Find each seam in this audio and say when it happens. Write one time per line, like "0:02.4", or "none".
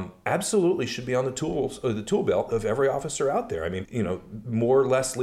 0:03.8